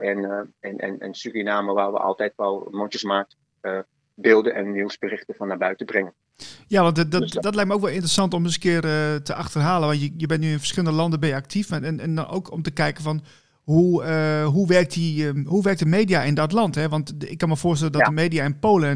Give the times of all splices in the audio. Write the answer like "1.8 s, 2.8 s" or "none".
none